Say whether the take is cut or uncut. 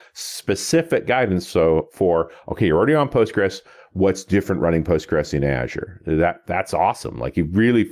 uncut